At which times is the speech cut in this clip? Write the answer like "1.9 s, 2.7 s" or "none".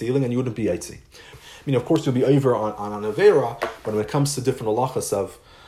1.3 s